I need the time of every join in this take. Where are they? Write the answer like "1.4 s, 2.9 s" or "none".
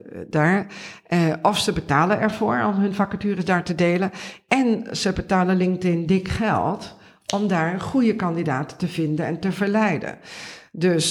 none